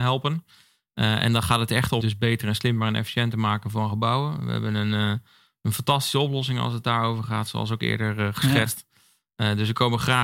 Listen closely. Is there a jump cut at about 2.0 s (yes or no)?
yes